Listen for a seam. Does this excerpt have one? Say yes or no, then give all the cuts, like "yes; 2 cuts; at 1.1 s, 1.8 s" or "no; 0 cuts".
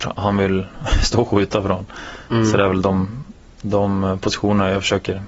no; 0 cuts